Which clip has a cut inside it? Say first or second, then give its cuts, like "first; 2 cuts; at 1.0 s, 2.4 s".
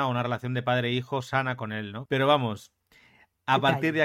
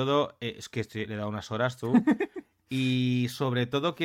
first; 1 cut; at 2.1 s